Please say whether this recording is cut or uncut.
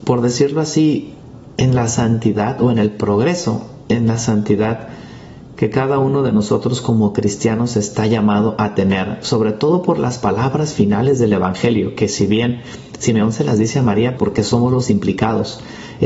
cut